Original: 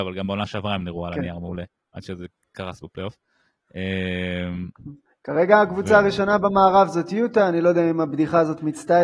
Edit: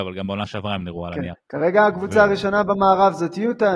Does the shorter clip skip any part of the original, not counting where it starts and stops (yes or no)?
yes